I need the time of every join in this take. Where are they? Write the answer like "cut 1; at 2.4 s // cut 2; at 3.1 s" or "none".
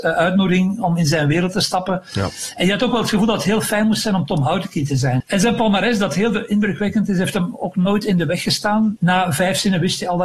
cut 1; at 5.2 s // cut 2; at 9.0 s